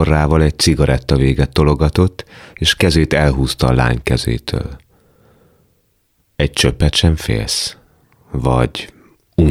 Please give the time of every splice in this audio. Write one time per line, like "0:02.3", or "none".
none